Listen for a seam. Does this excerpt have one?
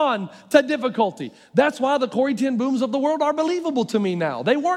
no; 0 cuts

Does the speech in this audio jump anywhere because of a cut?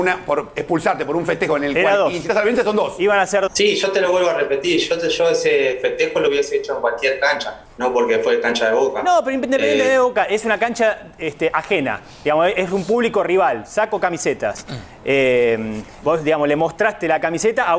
yes; 2 cuts; at 3.5 s, 16.0 s

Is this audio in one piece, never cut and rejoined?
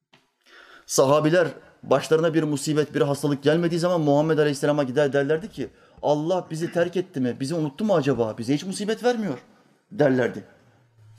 yes; 0 cuts

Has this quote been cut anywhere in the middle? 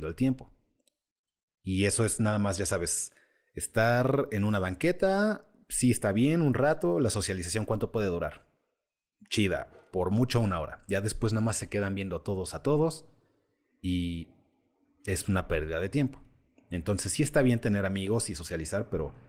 no; 0 cuts

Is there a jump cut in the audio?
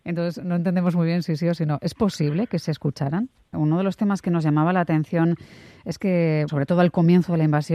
yes; 2 cuts; at 3.5 s, 6.5 s

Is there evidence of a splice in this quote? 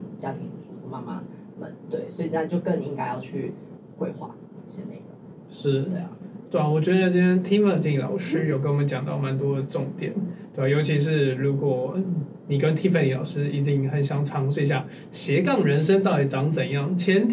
no; 0 cuts

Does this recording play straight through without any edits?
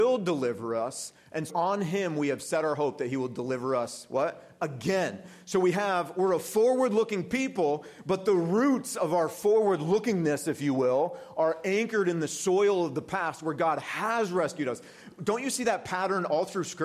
no; 1 cut; at 1.5 s

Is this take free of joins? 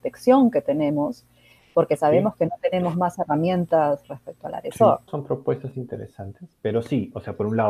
no; 2 cuts; at 5.1 s, 6.5 s

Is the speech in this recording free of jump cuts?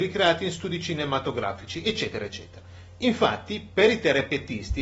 yes; 0 cuts

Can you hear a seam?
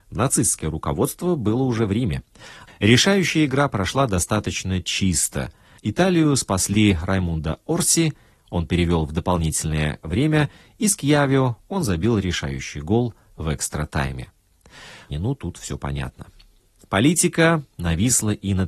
yes; 3 cuts; at 2.7 s, 5.8 s, 15.1 s

